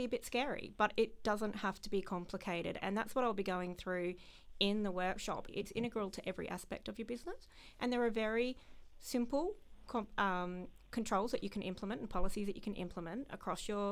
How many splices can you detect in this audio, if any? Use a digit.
1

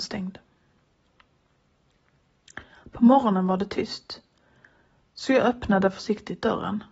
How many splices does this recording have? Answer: 0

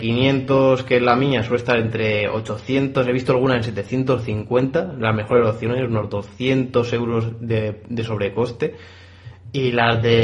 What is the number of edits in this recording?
0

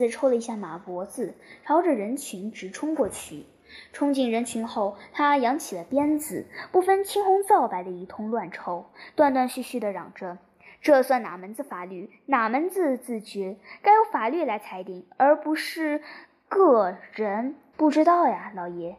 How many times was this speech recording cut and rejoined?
1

